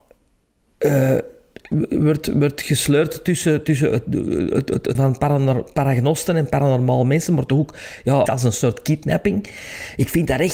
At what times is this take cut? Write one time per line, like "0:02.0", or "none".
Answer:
0:05.0
0:08.3

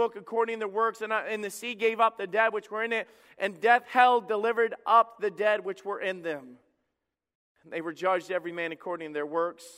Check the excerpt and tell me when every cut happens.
none

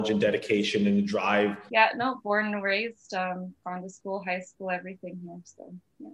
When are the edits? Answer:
0:01.7

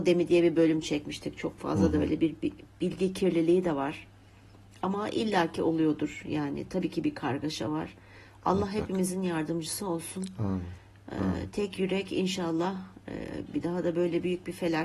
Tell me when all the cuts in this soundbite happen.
0:13.5

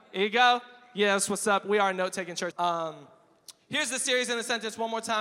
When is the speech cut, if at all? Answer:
0:02.5

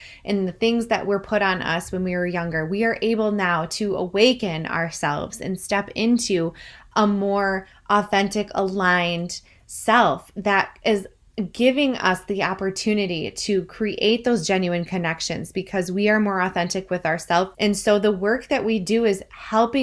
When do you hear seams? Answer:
0:17.5

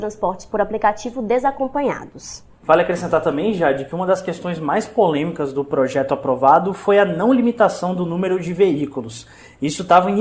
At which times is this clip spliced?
none

